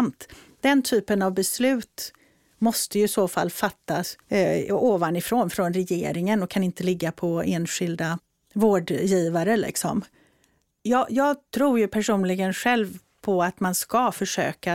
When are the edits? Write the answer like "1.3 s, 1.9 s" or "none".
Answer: 4.2 s